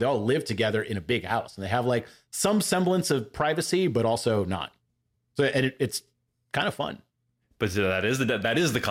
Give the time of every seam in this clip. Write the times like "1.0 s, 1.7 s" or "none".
none

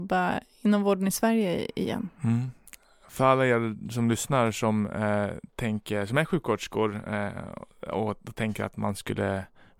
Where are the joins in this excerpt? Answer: none

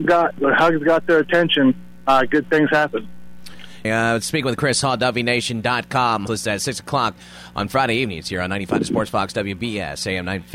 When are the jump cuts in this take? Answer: 3.8 s, 6.3 s

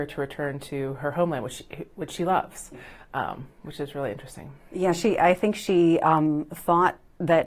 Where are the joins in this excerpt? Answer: none

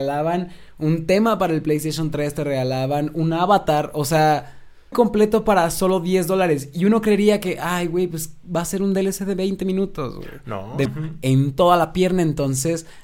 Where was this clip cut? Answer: 4.9 s, 10.9 s

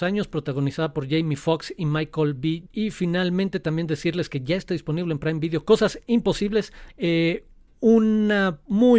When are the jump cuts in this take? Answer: 2.7 s, 6.9 s

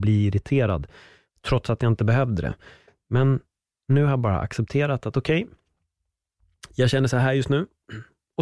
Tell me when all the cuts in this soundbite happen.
none

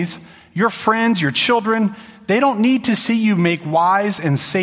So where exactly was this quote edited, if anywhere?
none

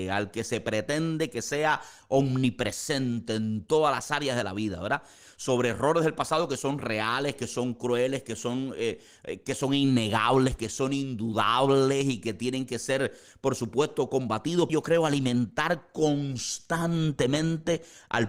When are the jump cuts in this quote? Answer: 14.7 s

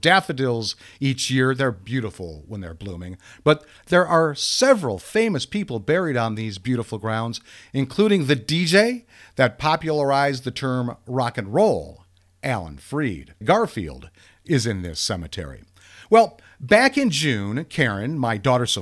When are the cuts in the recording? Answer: 13.4 s

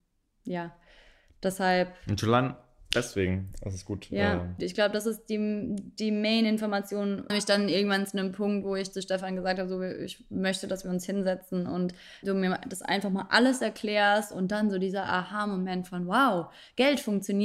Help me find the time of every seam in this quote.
4.6 s, 7.3 s, 12.2 s

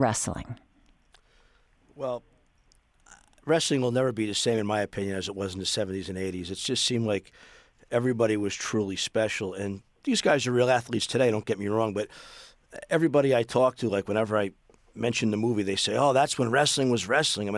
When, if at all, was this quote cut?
none

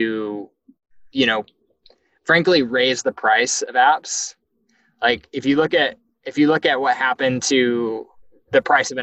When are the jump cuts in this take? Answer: none

